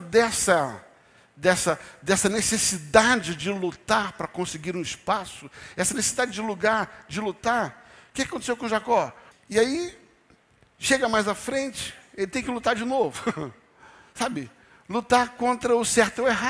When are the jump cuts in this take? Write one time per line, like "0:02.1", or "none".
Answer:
0:09.3